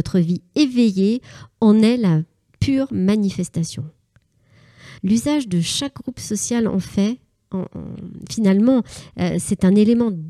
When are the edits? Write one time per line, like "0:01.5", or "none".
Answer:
0:05.0